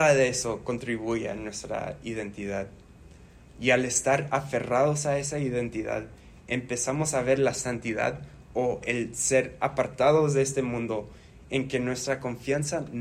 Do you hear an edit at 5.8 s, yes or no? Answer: no